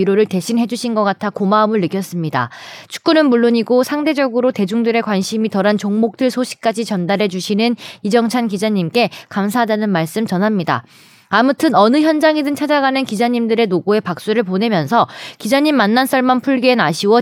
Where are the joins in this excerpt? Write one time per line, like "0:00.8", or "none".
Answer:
none